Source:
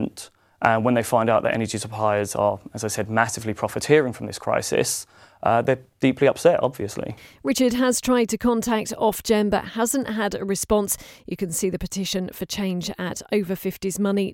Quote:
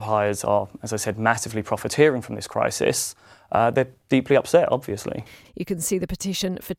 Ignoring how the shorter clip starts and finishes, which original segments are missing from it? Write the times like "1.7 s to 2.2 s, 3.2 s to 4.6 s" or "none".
7.4 s to 11.2 s